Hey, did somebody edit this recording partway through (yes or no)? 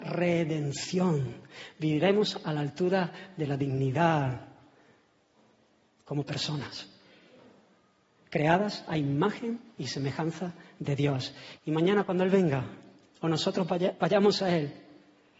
yes